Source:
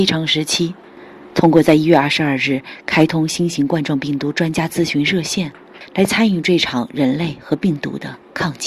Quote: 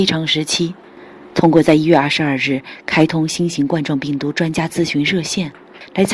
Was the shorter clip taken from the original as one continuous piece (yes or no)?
yes